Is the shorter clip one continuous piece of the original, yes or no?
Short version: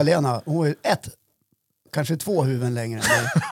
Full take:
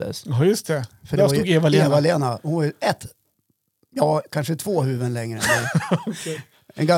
no